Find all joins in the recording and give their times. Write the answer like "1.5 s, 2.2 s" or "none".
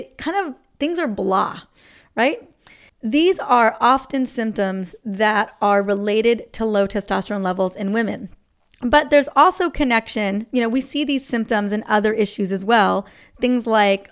none